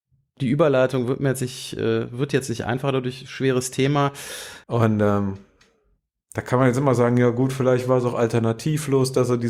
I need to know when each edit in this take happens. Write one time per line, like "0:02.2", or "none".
0:04.6